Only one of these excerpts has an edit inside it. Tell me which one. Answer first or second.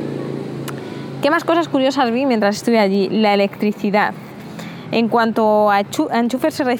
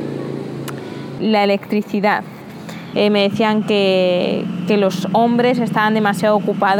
second